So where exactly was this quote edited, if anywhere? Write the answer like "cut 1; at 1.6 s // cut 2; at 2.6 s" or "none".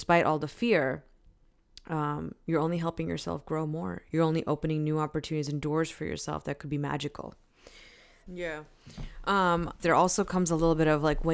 cut 1; at 4.1 s // cut 2; at 8.3 s // cut 3; at 9.8 s